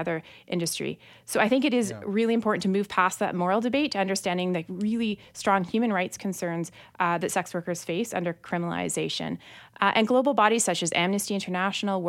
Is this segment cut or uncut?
uncut